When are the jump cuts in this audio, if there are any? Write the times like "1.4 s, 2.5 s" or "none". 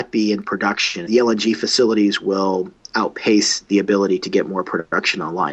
1.1 s